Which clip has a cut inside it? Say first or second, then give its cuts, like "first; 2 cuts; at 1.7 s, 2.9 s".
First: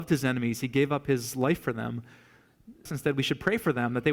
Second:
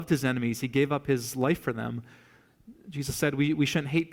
first; 1 cut; at 2.9 s